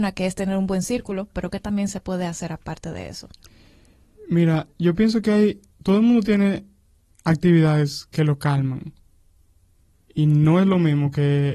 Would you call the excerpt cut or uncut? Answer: cut